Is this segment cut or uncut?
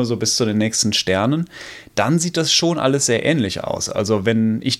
uncut